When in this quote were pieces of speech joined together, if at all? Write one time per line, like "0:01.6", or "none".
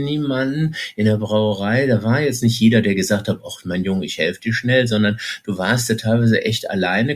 none